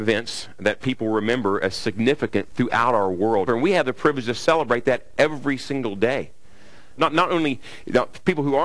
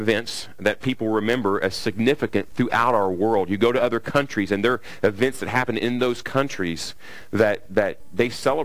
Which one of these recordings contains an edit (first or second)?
first